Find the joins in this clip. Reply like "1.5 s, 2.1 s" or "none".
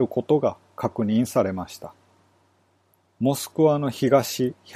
3.0 s